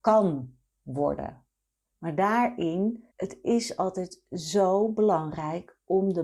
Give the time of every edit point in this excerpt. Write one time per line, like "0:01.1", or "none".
0:01.8
0:03.1